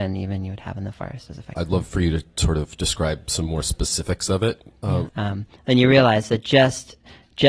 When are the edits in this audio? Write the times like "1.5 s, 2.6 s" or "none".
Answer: 1.5 s, 5.1 s

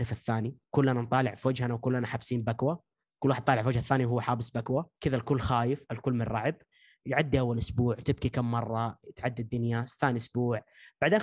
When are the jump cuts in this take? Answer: 5.0 s

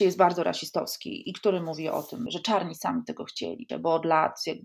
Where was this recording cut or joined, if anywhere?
2.3 s, 3.7 s

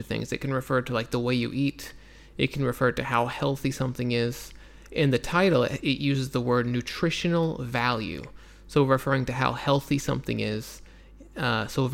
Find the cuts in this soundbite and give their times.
none

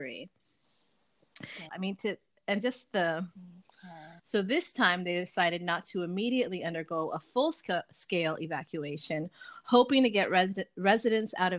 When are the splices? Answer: 1.7 s, 4.2 s

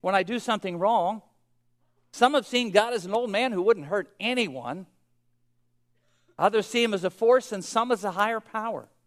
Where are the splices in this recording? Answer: none

